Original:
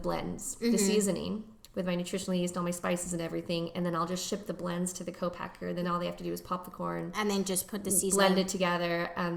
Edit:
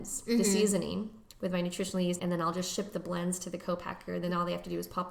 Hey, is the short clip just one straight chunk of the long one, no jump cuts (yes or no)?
no